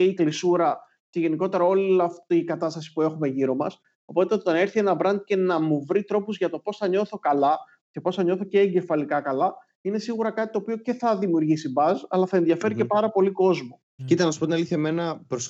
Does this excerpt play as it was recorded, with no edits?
no; 1 cut; at 14.0 s

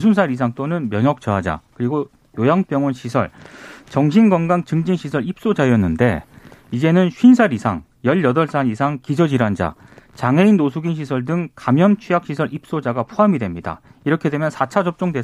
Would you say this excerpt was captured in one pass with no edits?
yes; 0 cuts

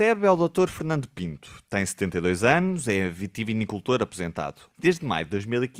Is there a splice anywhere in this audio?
yes; 1 cut; at 4.7 s

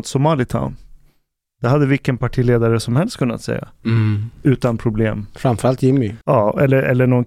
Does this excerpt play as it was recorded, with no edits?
no; 1 cut; at 6.2 s

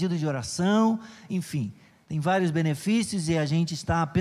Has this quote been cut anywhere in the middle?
no; 0 cuts

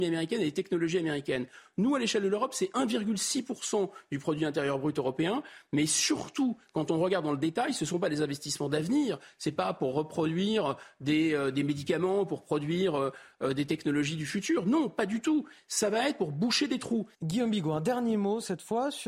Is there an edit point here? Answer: yes; 1 cut; at 17.1 s

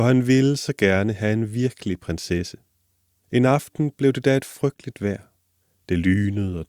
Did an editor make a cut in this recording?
no; 0 cuts

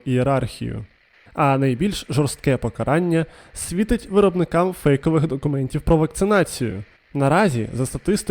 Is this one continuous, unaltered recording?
no; 2 cuts; at 1.3 s, 7.0 s

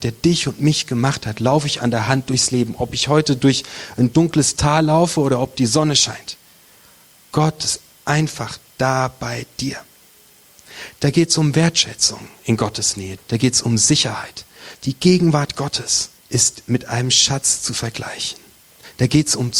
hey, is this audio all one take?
no; 3 cuts; at 13.2 s, 14.7 s, 16.2 s

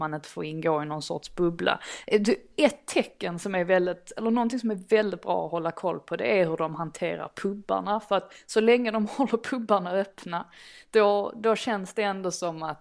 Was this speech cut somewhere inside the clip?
no; 0 cuts

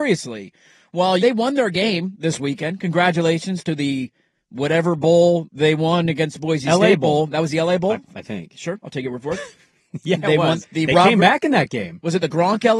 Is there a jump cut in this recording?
yes; 2 cuts; at 1.2 s, 10.6 s

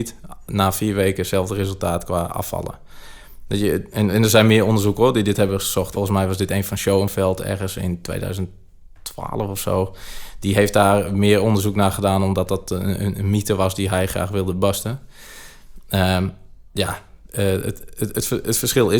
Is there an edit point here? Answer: yes; 1 cut; at 5.9 s

